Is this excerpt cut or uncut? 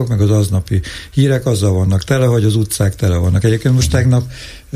uncut